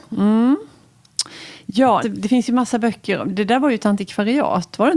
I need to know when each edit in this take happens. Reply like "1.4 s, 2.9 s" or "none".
2.0 s